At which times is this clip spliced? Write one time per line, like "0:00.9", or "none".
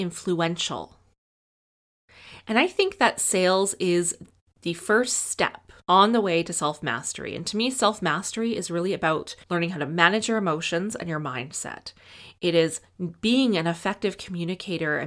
0:05.8
0:09.4